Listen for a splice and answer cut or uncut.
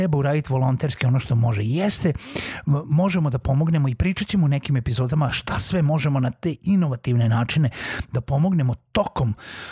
uncut